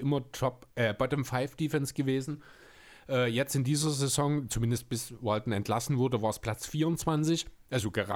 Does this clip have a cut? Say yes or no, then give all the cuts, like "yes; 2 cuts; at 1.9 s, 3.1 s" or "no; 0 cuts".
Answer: no; 0 cuts